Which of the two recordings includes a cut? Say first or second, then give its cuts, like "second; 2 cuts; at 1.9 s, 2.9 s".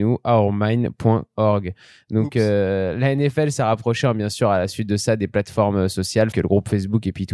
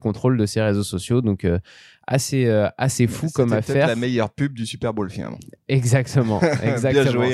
first; 1 cut; at 6.3 s